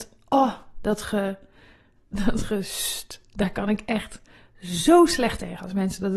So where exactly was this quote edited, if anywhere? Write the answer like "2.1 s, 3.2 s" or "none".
none